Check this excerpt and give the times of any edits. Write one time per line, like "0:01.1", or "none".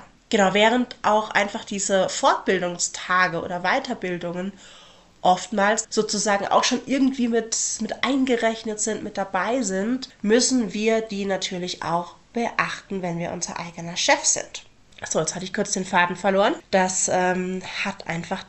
0:05.8